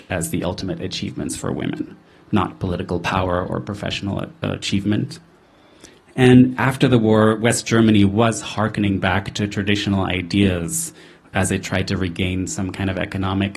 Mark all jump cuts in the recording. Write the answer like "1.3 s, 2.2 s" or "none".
none